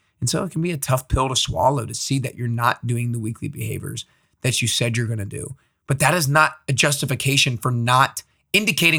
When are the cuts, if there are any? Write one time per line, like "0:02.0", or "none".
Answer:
none